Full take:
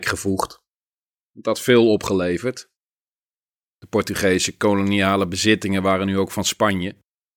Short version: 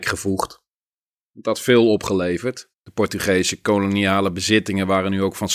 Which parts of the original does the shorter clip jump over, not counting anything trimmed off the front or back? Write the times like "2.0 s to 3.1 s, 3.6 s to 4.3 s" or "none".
2.7 s to 3.7 s